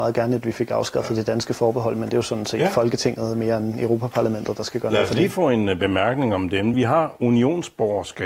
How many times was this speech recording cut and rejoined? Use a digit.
0